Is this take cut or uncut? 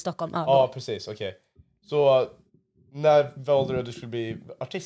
uncut